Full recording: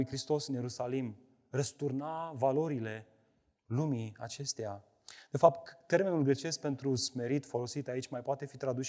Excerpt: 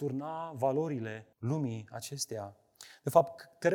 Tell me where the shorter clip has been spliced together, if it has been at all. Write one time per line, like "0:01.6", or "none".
0:01.3

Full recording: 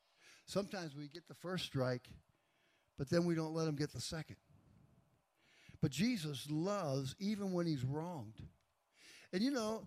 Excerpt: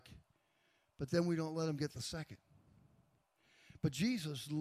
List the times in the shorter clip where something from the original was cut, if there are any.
none

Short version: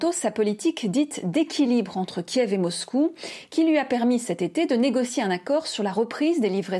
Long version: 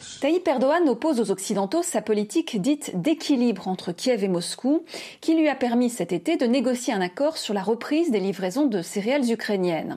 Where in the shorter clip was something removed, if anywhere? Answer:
none

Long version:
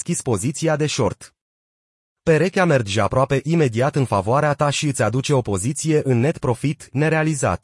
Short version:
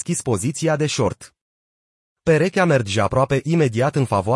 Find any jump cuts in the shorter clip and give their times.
none

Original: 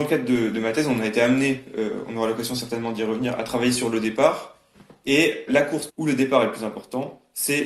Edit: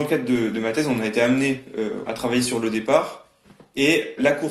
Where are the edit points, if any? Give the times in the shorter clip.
0:02.1

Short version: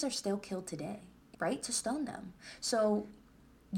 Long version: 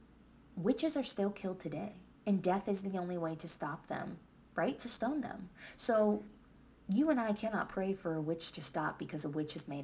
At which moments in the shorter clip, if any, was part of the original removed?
0:01.3

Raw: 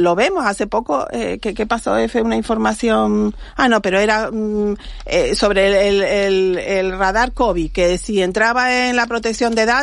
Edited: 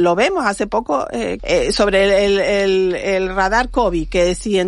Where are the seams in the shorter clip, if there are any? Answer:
0:01.4

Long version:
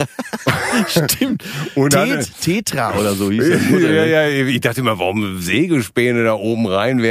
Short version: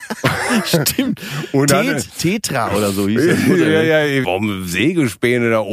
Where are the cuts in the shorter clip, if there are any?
0:04.2

